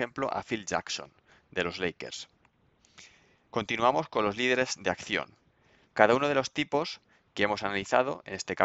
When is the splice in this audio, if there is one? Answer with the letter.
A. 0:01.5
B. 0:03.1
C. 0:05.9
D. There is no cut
C